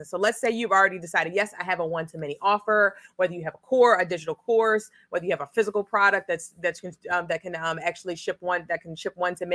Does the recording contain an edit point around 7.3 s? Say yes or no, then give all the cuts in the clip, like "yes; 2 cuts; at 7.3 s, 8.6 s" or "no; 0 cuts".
no; 0 cuts